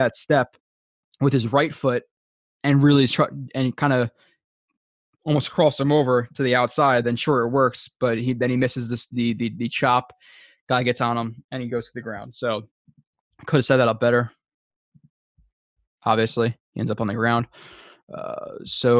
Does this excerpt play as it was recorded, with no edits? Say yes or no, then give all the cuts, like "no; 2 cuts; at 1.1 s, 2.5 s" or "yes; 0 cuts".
yes; 0 cuts